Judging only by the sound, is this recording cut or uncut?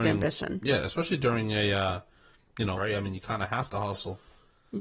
cut